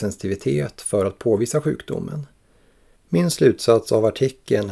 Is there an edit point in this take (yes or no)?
yes